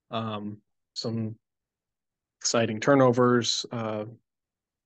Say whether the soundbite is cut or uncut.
cut